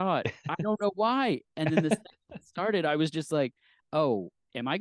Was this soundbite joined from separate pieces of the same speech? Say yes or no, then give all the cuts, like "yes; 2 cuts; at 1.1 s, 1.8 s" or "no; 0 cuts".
no; 0 cuts